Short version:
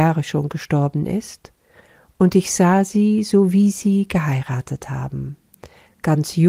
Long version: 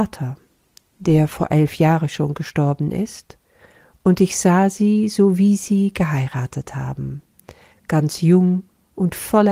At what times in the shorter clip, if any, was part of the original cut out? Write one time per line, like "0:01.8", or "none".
none